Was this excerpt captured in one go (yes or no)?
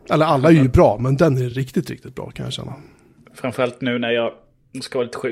yes